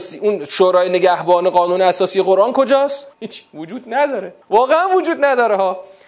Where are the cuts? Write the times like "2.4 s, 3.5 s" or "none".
3.1 s, 4.4 s